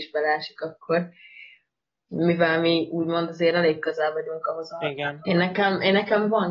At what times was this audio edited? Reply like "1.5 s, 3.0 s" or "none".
5.2 s